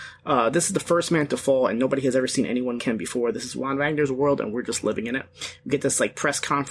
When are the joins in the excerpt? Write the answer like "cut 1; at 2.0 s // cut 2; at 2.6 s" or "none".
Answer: cut 1; at 2.8 s